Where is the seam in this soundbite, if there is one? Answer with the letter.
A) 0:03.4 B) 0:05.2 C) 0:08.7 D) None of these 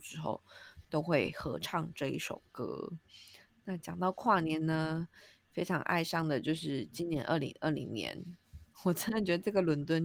C